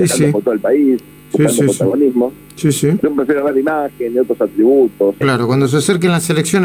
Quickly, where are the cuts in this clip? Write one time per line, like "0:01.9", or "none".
0:03.0
0:05.2